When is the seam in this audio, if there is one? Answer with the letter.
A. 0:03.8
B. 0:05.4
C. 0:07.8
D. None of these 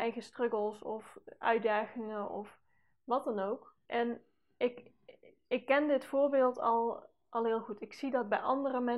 A